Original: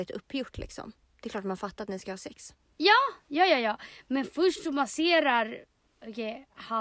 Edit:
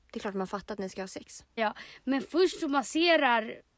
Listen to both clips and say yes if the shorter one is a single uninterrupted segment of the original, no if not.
no